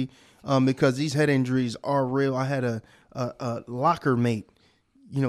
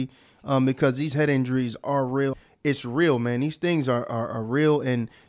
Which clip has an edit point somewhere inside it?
second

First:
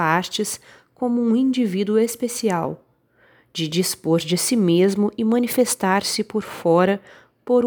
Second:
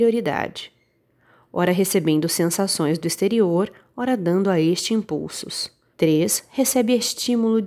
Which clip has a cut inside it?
second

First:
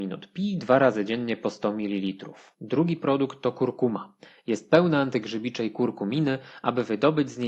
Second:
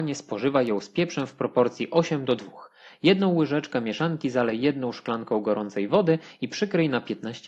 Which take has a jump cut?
first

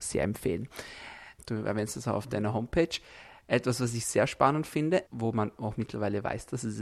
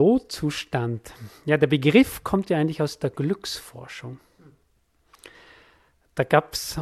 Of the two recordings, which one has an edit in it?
first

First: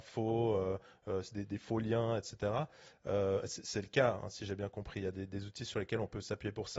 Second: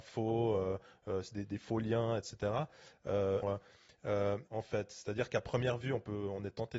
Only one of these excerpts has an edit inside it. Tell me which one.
second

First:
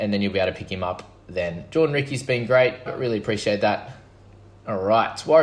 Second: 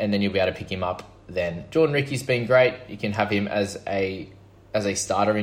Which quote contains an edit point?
first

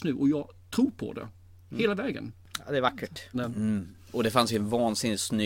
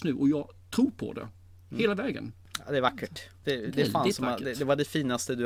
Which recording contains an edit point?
first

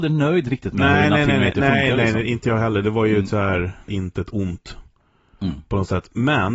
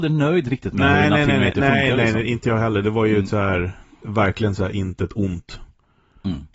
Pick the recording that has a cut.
first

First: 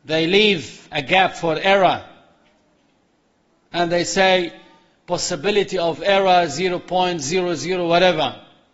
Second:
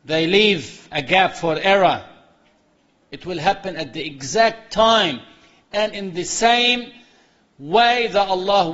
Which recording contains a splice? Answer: second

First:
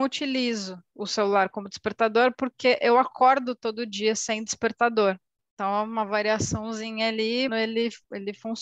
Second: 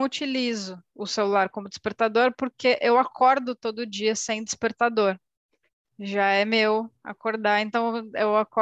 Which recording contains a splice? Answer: first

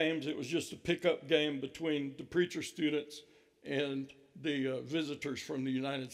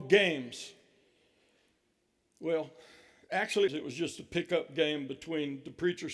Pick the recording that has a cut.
second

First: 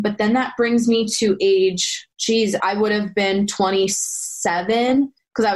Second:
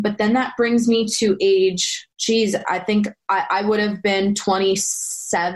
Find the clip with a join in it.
first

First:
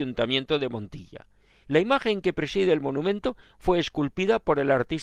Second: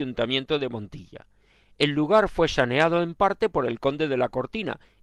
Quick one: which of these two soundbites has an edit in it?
first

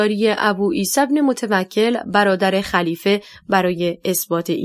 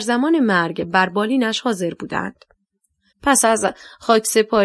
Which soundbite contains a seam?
second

